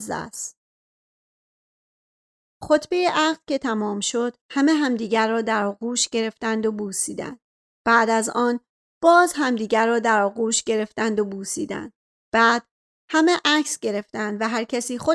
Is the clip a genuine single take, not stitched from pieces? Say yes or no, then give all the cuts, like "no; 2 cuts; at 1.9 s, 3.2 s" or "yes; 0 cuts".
yes; 0 cuts